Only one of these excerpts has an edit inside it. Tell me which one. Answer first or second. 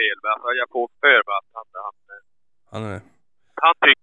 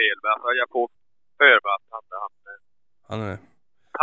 first